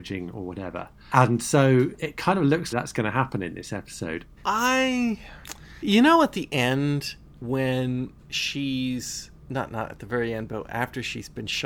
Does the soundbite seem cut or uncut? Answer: cut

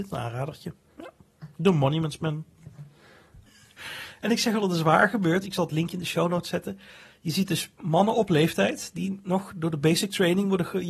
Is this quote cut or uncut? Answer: cut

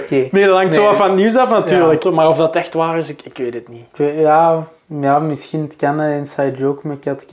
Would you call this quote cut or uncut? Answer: cut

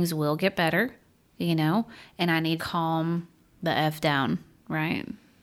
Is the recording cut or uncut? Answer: cut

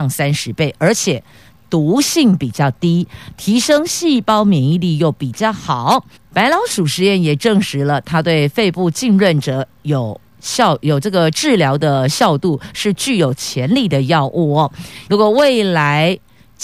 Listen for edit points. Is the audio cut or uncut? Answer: cut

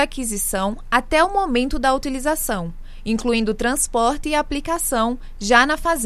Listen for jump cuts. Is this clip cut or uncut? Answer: uncut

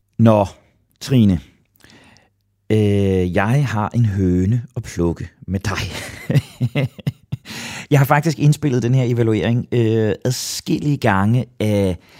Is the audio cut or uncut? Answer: uncut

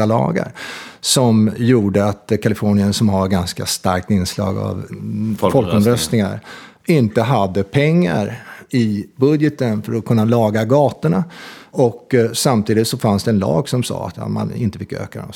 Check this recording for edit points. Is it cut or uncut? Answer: uncut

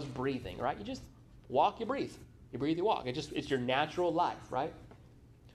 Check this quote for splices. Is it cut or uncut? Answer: uncut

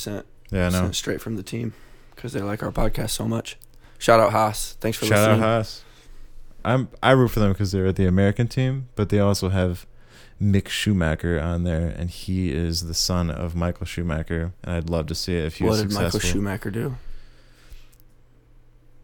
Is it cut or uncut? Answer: cut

